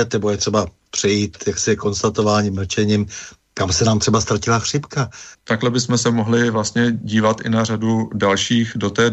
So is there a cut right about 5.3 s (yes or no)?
yes